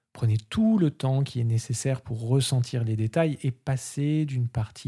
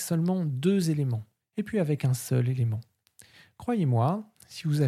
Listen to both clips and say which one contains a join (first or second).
second